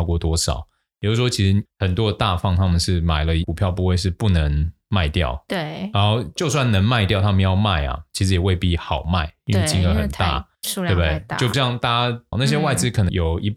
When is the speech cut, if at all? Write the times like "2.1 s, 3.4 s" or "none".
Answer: 12.3 s